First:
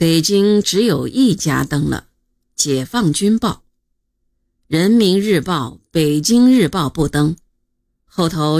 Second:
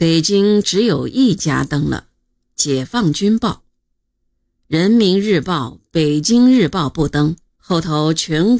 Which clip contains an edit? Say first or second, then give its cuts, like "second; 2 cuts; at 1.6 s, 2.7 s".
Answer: second; 1 cut; at 7.6 s